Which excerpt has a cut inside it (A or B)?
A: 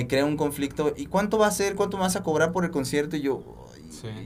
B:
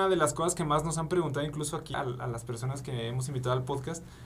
B